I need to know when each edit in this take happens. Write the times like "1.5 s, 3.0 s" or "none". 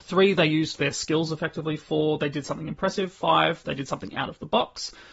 none